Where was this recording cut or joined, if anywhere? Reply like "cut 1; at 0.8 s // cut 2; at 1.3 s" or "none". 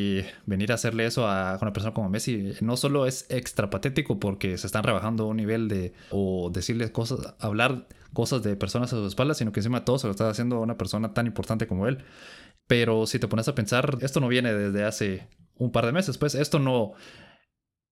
cut 1; at 6.1 s // cut 2; at 12.6 s // cut 3; at 14.0 s